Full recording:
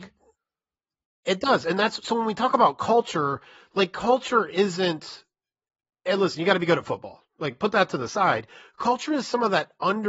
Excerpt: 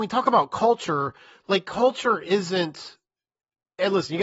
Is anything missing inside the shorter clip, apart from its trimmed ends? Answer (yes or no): no